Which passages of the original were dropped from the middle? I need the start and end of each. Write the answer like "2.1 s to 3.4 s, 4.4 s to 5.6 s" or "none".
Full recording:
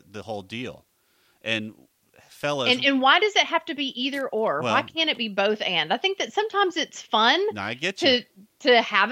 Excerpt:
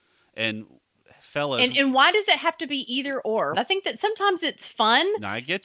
4.6 s to 5.9 s